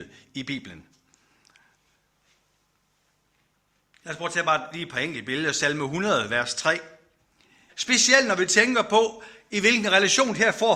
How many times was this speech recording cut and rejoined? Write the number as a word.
one